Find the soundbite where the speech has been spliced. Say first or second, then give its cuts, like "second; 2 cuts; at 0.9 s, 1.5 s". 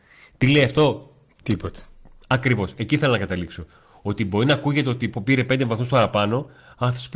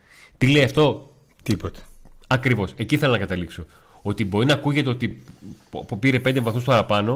first; 1 cut; at 5.1 s